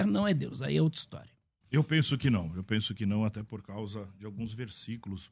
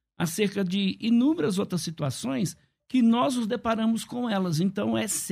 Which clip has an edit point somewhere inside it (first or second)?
first